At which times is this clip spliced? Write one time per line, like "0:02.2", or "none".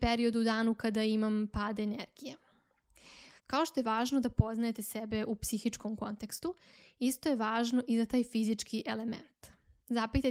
0:03.4